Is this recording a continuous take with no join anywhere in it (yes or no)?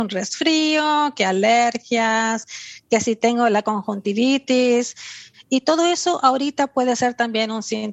yes